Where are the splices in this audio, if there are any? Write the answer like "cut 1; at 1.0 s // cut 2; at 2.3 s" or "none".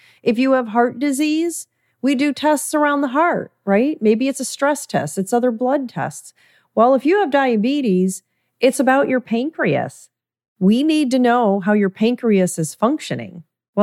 none